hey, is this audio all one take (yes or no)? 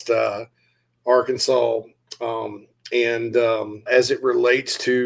no